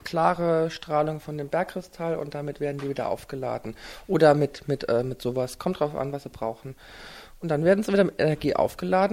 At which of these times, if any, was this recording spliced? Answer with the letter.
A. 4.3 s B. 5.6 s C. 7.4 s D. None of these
D